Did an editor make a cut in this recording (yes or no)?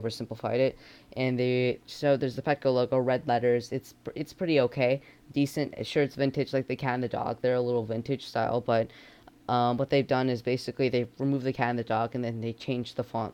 no